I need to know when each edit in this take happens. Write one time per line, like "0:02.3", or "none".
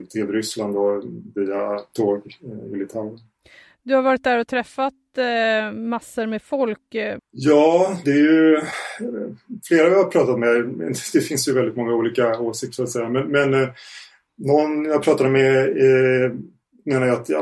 0:07.2